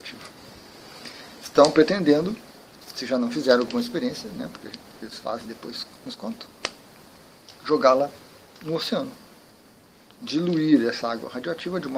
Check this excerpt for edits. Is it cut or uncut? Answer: uncut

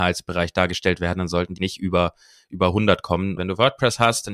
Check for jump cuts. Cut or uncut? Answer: cut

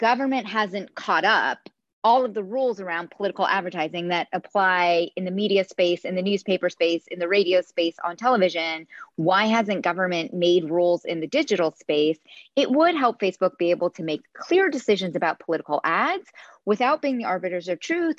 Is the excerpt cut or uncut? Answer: uncut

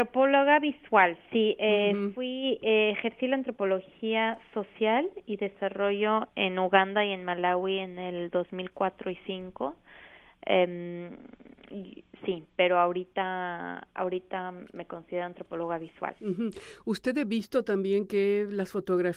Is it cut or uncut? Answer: uncut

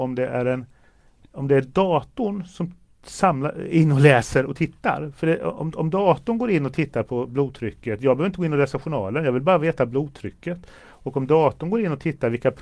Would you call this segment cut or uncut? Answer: uncut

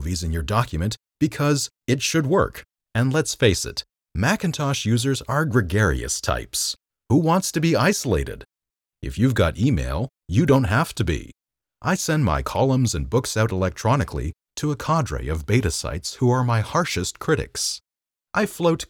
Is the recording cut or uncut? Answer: cut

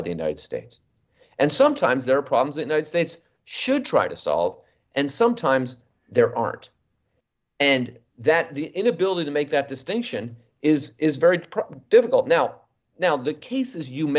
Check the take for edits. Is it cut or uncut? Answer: uncut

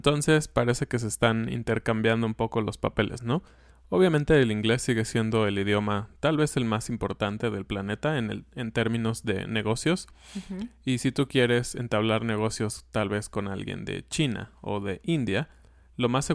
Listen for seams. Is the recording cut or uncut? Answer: uncut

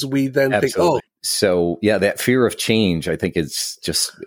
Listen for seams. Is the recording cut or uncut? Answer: cut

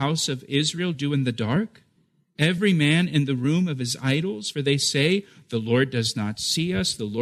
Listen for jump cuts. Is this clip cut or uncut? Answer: uncut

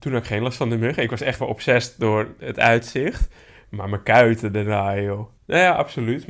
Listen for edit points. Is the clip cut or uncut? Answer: cut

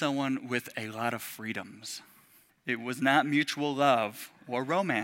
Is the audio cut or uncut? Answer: cut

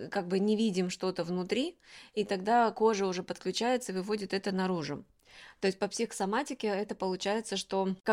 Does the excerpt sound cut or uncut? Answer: uncut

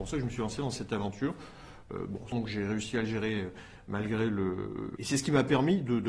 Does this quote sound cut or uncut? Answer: cut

